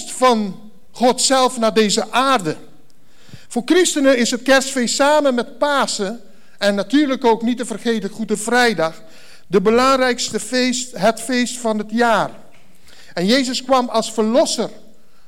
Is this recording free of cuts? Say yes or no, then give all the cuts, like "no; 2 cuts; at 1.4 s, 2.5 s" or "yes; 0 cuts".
yes; 0 cuts